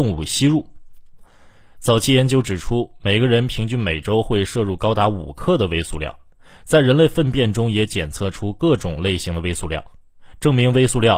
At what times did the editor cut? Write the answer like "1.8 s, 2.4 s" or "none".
none